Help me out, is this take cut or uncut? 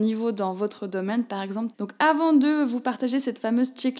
cut